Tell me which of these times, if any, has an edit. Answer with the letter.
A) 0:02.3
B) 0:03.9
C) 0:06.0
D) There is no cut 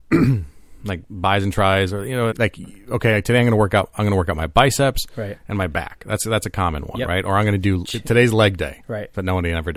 A